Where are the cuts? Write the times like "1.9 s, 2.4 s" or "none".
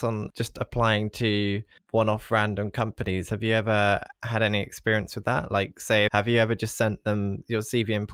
6.1 s

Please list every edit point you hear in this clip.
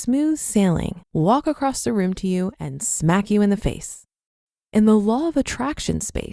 1.0 s

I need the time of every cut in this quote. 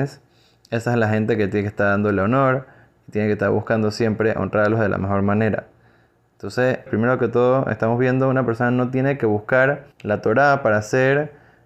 6.9 s, 9.9 s

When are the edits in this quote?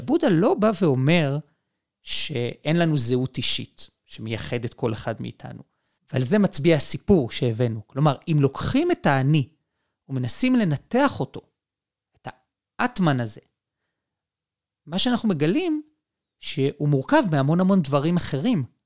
6.0 s

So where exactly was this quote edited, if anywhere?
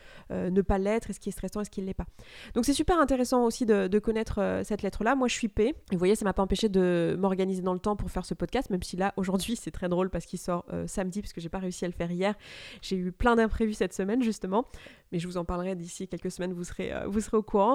5.8 s

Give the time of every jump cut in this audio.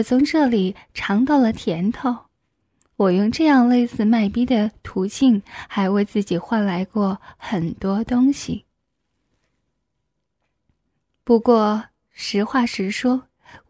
none

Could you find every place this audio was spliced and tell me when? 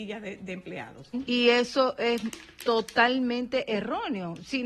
1.1 s

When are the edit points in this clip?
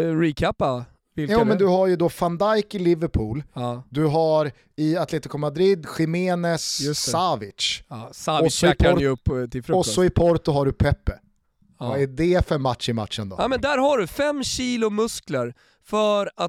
none

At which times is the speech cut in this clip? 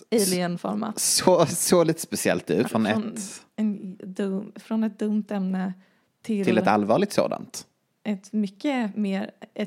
2.6 s

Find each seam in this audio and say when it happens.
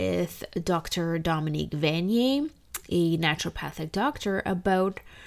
none

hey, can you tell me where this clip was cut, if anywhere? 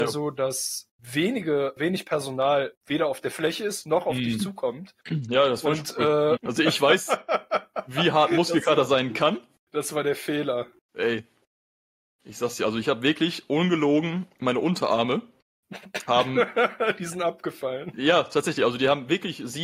6.4 s

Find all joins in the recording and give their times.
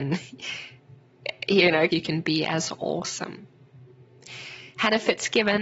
1.9 s

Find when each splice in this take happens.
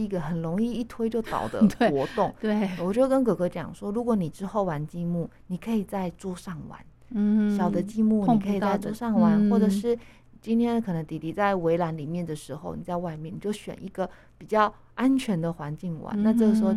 none

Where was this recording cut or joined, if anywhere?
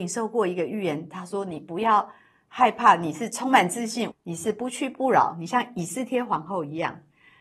4.1 s

